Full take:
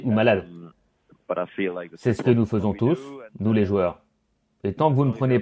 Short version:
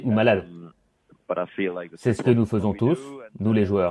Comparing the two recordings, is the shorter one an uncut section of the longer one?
yes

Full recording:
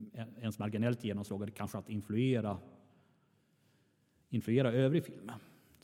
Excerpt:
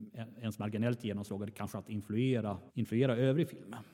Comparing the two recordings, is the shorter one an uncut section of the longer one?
no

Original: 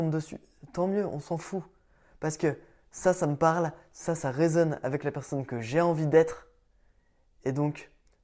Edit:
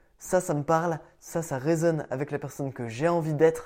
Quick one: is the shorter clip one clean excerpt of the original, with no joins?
yes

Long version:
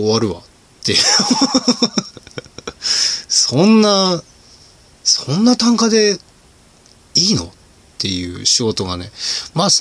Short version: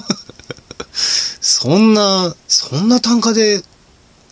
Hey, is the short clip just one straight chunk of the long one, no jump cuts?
no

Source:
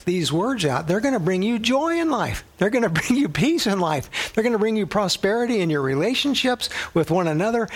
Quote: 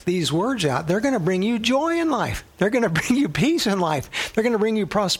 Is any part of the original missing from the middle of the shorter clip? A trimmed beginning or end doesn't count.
no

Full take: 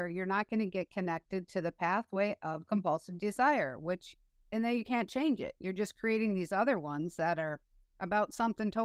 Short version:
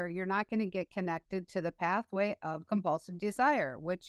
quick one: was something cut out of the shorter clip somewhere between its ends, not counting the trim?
no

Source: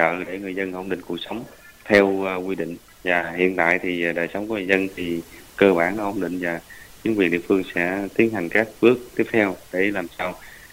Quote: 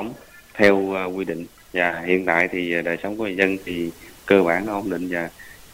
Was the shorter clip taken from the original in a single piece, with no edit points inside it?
yes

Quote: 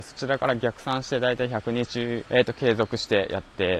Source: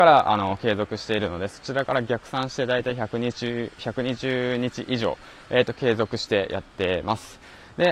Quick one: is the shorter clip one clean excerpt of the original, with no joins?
no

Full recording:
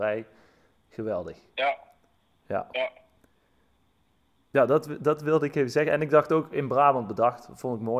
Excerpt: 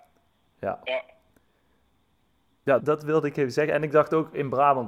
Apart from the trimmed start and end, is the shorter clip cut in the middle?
yes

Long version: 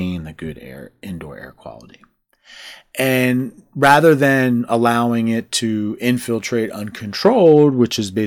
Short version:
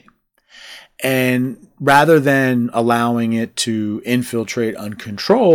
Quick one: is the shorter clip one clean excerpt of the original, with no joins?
yes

